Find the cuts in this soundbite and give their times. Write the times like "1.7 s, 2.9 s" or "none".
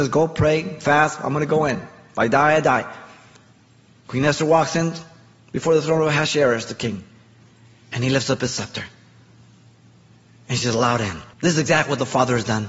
11.3 s